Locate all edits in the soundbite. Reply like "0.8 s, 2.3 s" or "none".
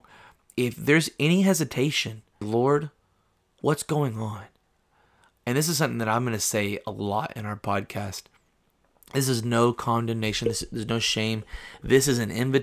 2.4 s